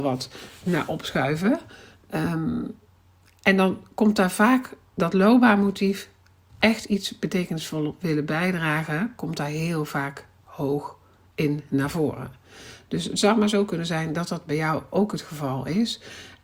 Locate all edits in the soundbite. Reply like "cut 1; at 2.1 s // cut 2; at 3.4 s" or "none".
none

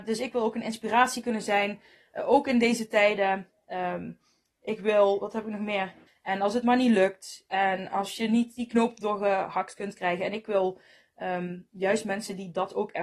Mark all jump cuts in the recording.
cut 1; at 6.1 s

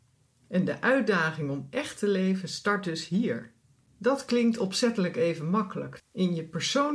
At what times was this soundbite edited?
cut 1; at 6.0 s

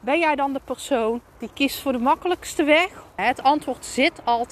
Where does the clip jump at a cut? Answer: cut 1; at 1.3 s // cut 2; at 3.2 s

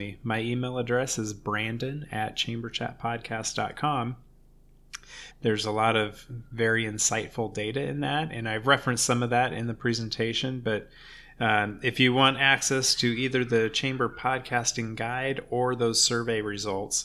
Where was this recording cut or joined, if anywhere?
cut 1; at 5.3 s

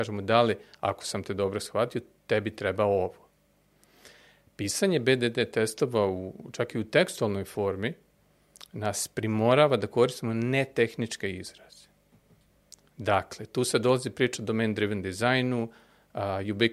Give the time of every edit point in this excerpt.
none

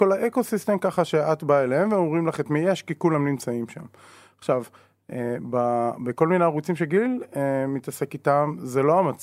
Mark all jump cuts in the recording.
none

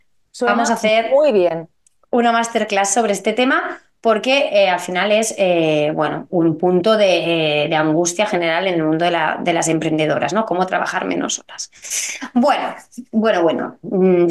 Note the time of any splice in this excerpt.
cut 1; at 6.3 s

